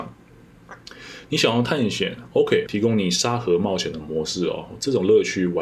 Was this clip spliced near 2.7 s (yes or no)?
yes